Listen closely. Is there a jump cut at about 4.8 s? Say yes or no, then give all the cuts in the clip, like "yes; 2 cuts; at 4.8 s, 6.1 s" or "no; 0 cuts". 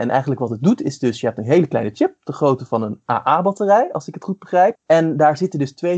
yes; 1 cut; at 4.8 s